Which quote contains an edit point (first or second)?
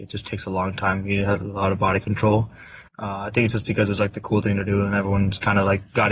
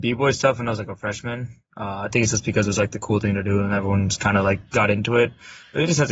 first